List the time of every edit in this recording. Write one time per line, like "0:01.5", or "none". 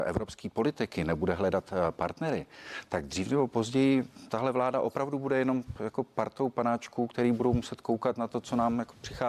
none